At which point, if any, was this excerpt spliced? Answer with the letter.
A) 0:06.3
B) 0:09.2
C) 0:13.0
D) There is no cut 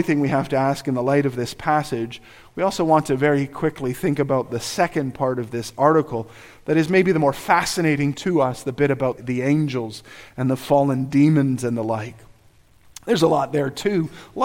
B